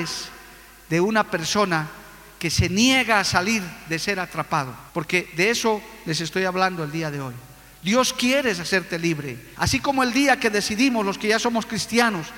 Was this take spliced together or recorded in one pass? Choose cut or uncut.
cut